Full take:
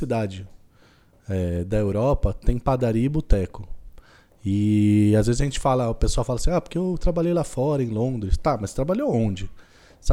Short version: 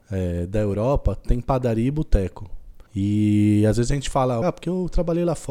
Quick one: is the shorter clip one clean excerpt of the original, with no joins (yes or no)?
no